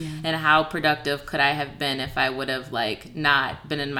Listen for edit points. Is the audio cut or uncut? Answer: uncut